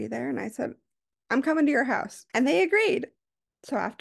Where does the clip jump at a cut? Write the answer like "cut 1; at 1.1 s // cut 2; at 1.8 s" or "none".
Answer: cut 1; at 1.1 s // cut 2; at 2.3 s